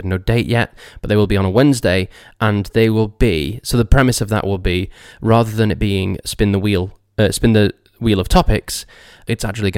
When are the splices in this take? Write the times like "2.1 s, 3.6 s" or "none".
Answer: none